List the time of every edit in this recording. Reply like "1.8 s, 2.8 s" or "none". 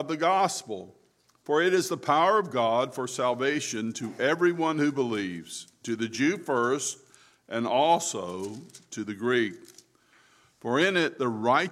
none